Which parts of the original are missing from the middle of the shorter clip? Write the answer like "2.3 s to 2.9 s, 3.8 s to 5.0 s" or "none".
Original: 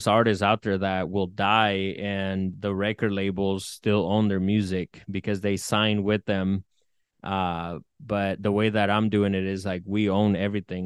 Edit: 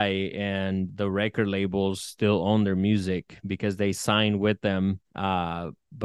6.7 s to 7.1 s